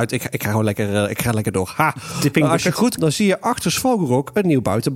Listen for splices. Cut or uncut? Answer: cut